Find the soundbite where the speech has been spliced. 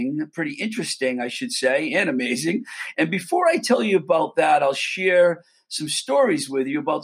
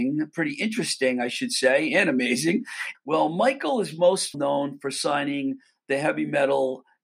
second; 2 cuts; at 2.9 s, 4.3 s

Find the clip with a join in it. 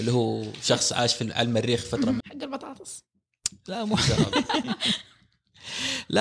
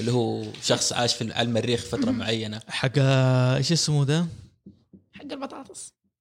first; 2 cuts; at 2.2 s, 4.6 s

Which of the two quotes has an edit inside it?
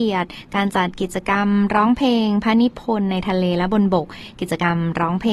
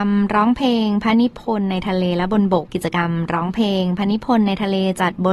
second; 1 cut; at 2.7 s

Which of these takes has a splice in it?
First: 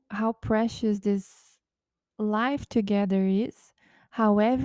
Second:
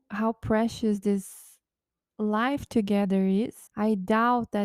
second; 1 cut; at 3.7 s

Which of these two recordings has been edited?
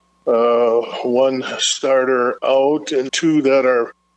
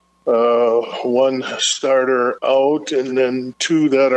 first; 1 cut; at 3.1 s

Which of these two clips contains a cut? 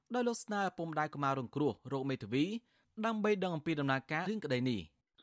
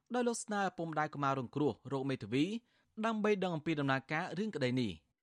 first; 1 cut; at 4.2 s

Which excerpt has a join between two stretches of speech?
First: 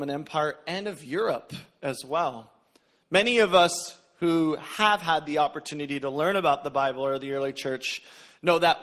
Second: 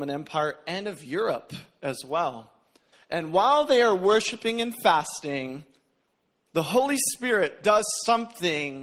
second; 1 cut; at 2.9 s

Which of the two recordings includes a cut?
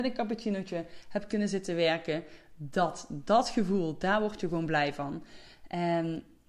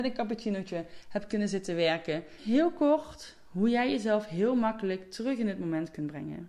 second; 1 cut; at 2.4 s

